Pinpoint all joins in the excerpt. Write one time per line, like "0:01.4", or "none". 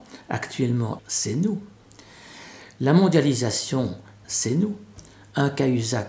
0:01.0
0:04.2